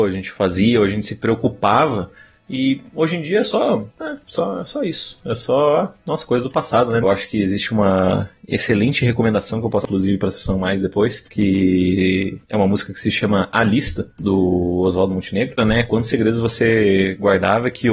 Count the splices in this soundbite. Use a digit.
2